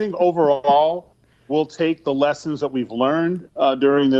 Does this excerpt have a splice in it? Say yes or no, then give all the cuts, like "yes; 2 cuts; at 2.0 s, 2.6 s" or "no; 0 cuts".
no; 0 cuts